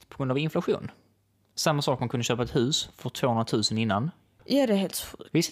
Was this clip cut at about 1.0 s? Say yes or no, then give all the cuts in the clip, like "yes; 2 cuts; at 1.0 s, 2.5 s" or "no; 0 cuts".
no; 1 cut; at 4.4 s